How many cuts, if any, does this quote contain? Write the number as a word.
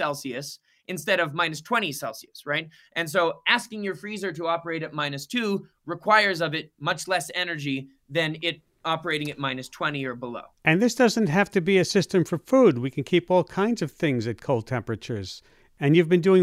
one